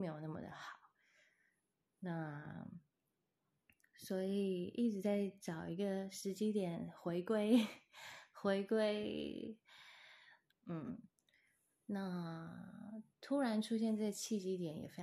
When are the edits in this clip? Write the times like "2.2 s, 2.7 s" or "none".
10.5 s, 13.1 s